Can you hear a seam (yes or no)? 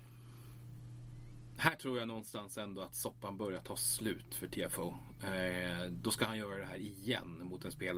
no